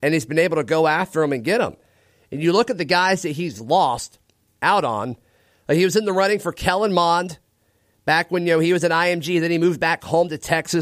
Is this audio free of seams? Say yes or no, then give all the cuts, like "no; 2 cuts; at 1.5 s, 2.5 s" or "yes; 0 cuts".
yes; 0 cuts